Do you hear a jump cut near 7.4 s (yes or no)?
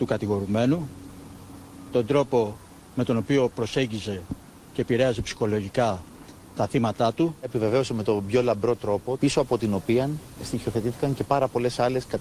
no